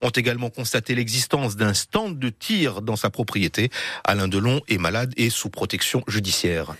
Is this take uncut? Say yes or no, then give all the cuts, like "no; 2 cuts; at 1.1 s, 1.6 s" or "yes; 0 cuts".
yes; 0 cuts